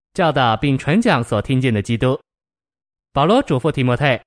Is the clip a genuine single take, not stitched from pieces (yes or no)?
yes